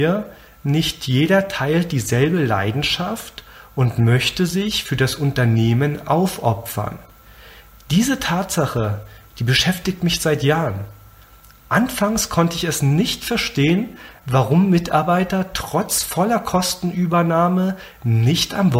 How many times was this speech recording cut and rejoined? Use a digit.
0